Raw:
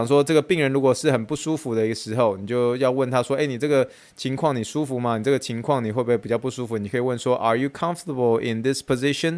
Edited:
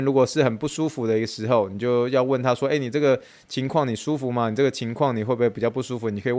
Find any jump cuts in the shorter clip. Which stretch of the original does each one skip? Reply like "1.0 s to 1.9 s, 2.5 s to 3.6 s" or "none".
none